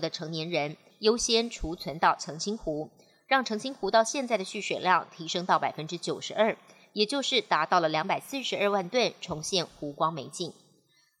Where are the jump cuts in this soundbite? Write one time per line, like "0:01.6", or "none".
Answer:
0:00.9

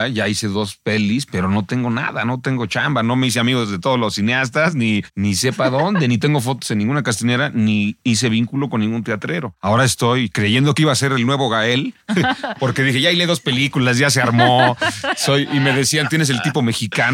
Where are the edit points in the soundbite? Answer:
none

